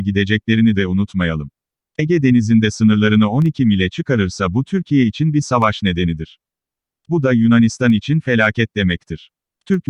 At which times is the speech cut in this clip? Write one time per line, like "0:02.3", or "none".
0:01.8